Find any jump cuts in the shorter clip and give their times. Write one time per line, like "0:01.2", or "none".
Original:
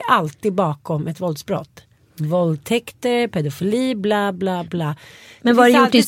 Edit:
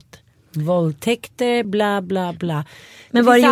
0:01.6

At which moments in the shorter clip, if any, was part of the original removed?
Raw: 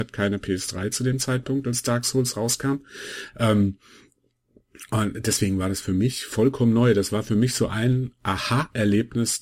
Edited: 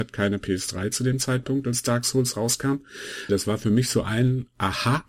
0:03.3

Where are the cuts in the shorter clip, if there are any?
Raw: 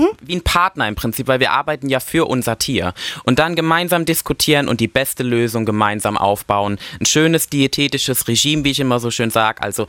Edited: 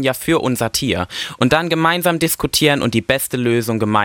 none

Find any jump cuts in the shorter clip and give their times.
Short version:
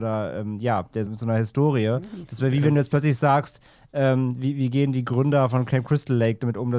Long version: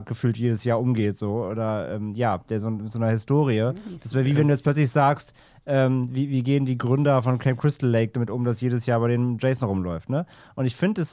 0:01.1

